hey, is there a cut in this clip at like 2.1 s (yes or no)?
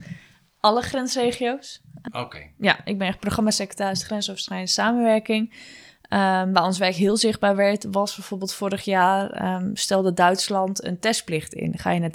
yes